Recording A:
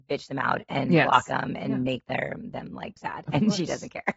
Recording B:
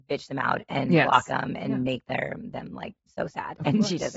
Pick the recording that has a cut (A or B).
A